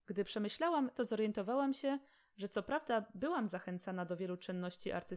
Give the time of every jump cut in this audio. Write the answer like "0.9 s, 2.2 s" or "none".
0.9 s

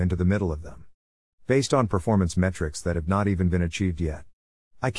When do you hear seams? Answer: 1.3 s

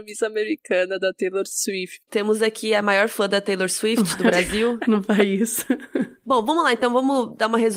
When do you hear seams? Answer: 2.1 s

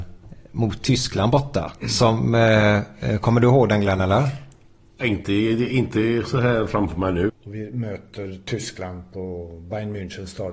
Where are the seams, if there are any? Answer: 1.8 s, 7.3 s

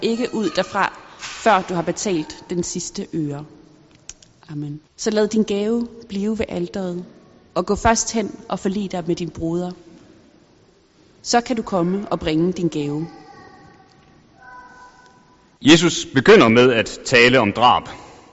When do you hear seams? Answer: 4.9 s, 15.6 s

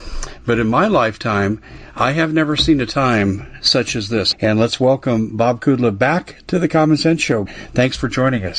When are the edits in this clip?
4.3 s, 7.5 s

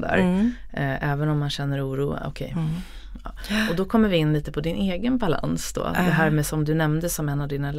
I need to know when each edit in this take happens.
none

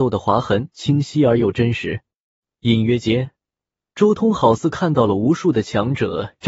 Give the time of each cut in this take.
none

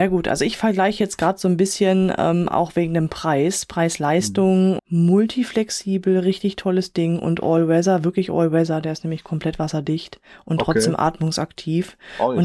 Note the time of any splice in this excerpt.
4.8 s

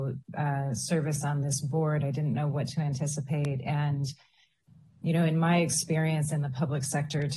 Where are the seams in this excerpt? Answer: none

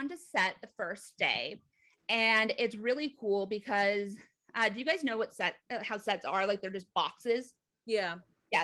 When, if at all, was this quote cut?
none

